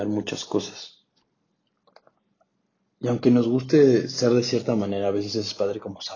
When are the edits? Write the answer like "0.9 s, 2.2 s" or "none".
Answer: none